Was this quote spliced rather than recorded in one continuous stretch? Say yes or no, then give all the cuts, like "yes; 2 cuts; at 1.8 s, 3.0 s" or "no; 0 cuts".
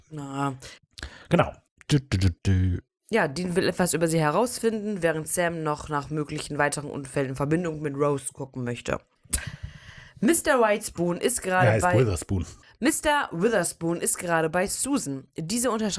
no; 0 cuts